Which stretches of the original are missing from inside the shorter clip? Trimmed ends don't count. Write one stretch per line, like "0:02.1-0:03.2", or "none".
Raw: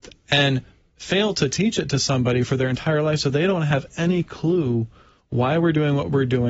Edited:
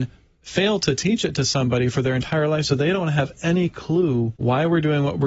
0:04.9-0:05.3

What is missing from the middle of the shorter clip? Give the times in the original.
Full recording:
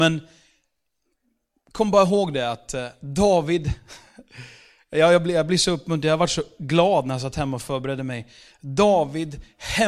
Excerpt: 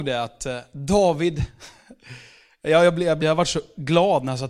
0:05.5-0:06.0

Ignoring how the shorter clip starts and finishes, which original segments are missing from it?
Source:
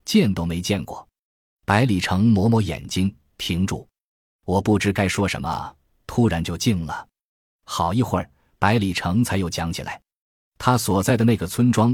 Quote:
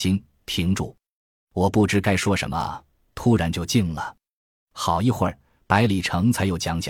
none

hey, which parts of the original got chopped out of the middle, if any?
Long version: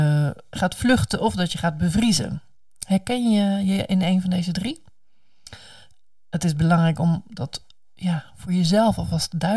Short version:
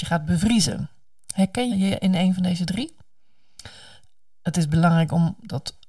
0:03.2-0:03.6

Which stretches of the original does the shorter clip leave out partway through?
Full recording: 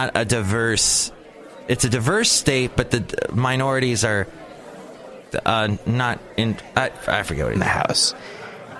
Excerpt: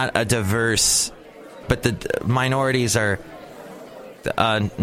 0:01.6-0:02.7

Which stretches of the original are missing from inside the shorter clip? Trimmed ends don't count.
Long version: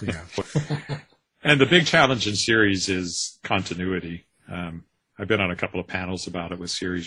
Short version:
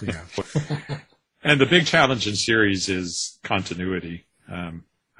none

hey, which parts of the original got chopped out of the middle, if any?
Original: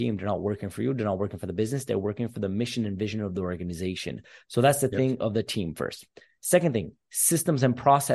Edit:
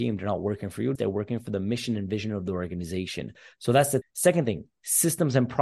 0:01.0-0:01.8
0:04.9-0:06.3

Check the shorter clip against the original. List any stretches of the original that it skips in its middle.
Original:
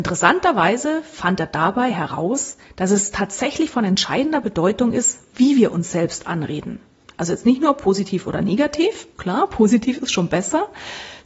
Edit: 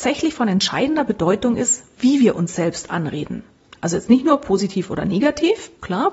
none

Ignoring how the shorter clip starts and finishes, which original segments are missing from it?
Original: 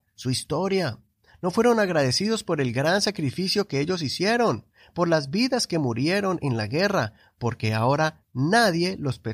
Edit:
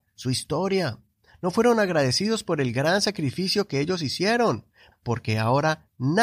0:04.9-0:07.3

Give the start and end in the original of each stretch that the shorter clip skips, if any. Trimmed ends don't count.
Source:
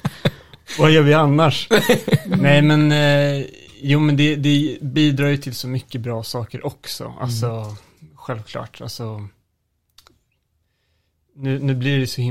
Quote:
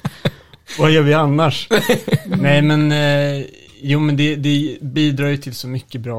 none

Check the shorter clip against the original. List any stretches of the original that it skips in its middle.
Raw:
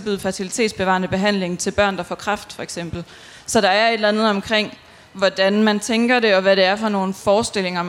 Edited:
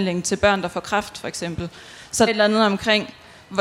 0:03.6-0:03.9

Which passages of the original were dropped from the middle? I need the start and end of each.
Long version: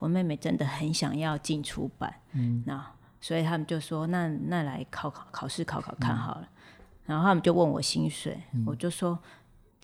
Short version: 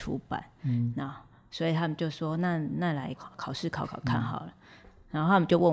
0:04.8-0:05.1

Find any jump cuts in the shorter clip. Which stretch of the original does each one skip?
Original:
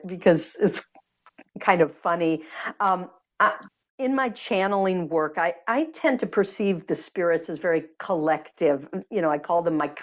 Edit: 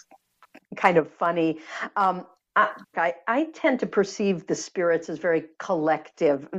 0:03.8-0:05.3

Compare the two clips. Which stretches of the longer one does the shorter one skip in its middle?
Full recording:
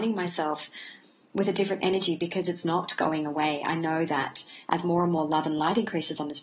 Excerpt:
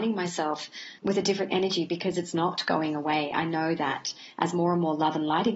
0:01.0-0:01.3

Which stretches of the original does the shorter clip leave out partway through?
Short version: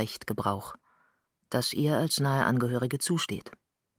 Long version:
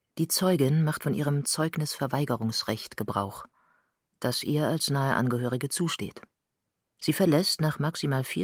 none

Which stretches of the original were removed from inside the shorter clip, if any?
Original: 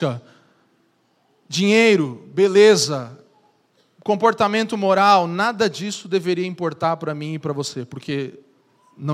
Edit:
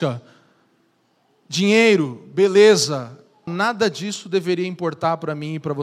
0:03.5-0:05.3

